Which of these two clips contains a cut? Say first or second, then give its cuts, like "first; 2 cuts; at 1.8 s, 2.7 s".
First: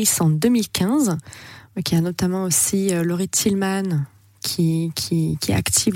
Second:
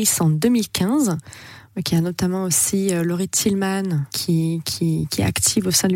second; 1 cut; at 4.1 s